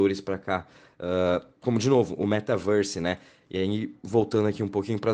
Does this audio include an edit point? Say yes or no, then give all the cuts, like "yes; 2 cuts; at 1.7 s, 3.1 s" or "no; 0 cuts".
yes; 1 cut; at 1.6 s